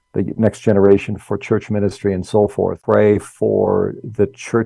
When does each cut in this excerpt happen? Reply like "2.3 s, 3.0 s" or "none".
2.8 s